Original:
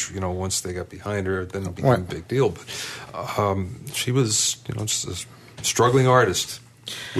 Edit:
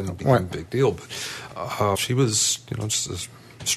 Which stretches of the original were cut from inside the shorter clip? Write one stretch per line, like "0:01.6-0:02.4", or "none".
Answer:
0:03.5-0:03.9